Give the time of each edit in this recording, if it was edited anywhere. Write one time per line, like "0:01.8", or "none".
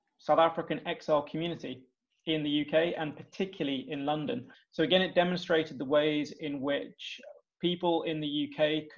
0:04.5